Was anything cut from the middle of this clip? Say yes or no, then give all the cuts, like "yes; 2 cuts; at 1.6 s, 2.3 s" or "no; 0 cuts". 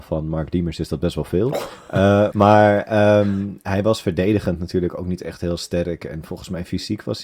yes; 1 cut; at 2.3 s